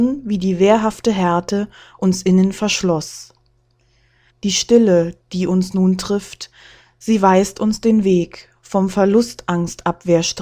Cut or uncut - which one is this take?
cut